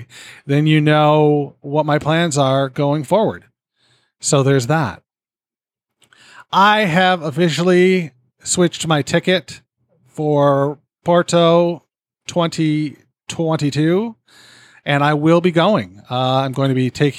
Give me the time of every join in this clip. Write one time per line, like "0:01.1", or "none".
none